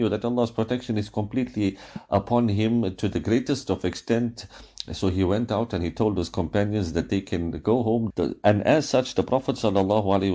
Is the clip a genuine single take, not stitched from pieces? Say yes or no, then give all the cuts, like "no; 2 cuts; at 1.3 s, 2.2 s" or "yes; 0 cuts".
no; 1 cut; at 8.1 s